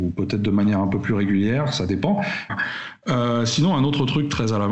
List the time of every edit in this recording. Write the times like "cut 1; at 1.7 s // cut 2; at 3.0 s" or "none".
cut 1; at 2.5 s